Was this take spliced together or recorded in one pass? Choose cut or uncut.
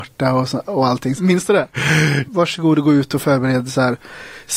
cut